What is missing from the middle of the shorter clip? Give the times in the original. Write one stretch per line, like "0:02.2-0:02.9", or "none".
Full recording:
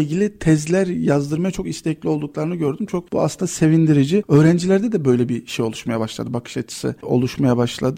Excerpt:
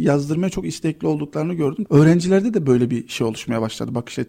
0:02.9-0:04.2